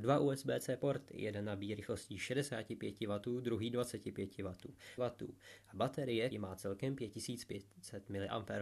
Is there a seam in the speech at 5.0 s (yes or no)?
yes